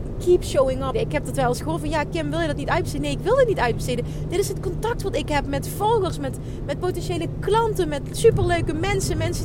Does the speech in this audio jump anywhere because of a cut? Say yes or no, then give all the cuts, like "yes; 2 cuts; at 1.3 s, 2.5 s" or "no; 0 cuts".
yes; 1 cut; at 0.9 s